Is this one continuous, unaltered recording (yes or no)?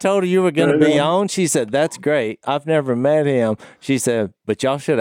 yes